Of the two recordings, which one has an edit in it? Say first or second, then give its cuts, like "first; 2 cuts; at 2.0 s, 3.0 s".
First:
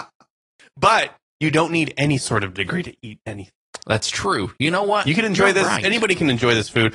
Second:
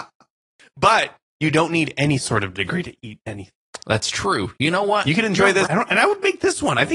second; 1 cut; at 5.7 s